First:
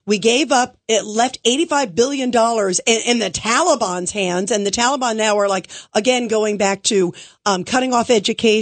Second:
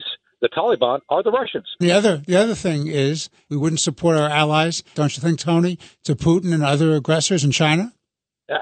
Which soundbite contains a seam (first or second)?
second